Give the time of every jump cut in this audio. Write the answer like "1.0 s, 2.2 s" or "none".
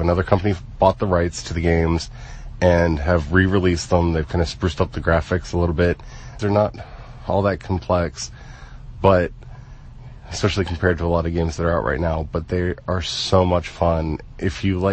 6.4 s

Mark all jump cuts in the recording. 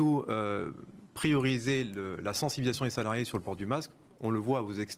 none

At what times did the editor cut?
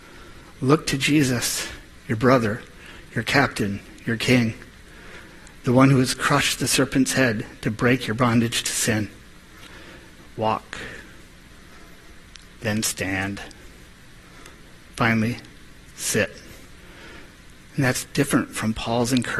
10.2 s

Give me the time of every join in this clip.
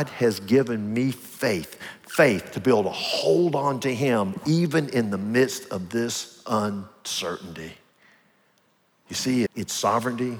9.5 s

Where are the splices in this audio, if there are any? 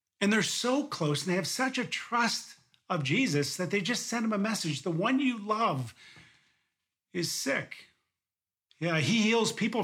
8.7 s

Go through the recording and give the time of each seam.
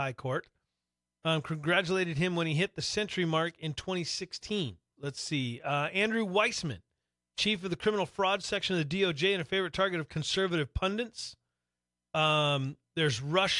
5.0 s

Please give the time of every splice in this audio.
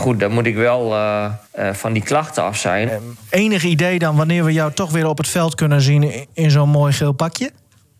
1.4 s, 2.9 s

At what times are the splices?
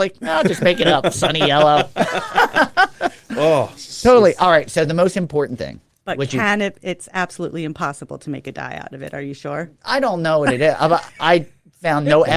none

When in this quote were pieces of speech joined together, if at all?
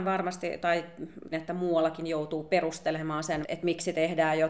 1.3 s, 3.4 s

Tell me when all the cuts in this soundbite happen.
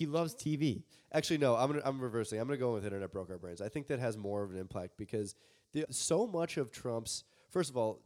5.8 s

